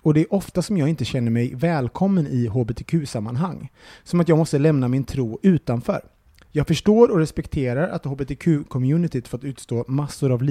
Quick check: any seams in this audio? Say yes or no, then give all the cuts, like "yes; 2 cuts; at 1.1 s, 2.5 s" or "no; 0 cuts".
no; 0 cuts